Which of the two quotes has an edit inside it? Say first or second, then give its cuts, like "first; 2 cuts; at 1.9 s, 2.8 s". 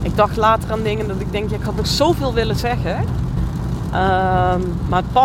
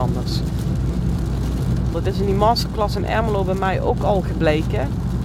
second; 1 cut; at 1.9 s